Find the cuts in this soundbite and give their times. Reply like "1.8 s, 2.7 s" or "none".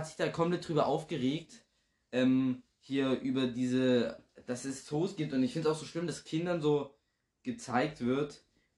none